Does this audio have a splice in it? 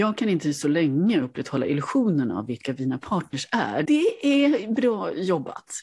yes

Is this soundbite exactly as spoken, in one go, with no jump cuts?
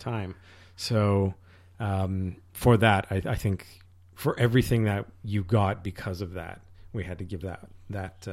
yes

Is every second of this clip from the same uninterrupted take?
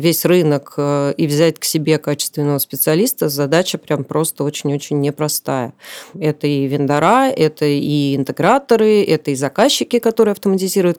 no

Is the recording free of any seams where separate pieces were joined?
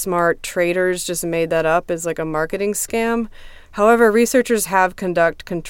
no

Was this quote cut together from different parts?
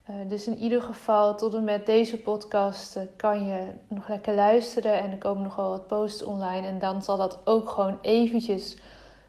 no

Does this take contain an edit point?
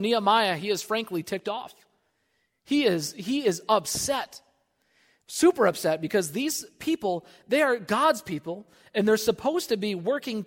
no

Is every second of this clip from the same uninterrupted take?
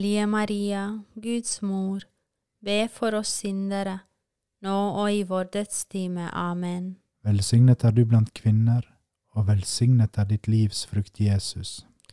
no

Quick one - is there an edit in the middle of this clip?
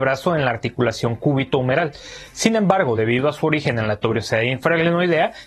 no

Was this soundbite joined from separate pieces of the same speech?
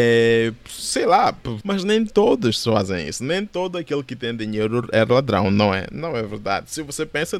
yes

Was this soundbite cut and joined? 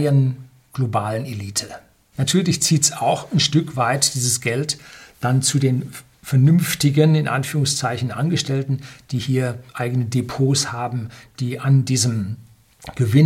yes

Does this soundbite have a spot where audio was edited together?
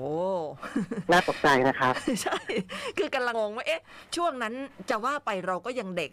yes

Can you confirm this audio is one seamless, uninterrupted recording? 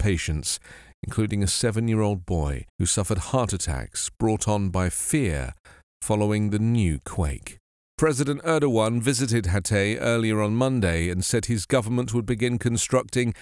no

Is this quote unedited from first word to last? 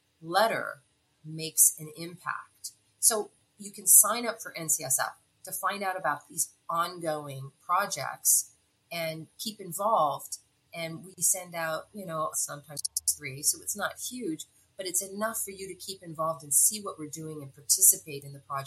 no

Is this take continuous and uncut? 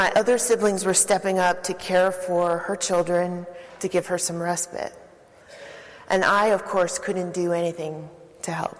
yes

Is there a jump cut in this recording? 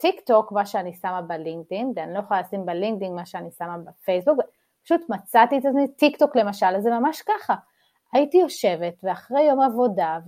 no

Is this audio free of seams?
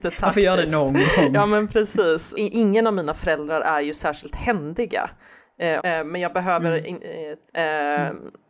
no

